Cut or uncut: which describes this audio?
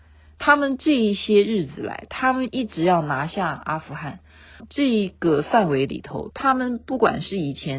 cut